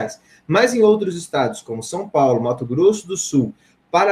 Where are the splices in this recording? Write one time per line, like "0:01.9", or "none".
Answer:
none